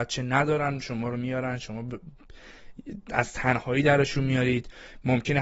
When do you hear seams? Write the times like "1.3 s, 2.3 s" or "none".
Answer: none